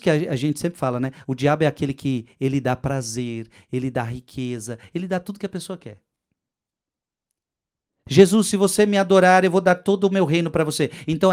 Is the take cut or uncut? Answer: uncut